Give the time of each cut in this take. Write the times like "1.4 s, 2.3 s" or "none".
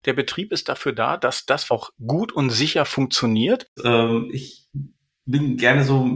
1.7 s, 3.8 s